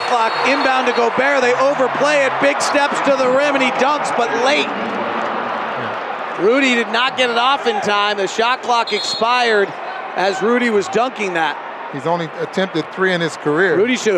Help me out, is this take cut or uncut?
cut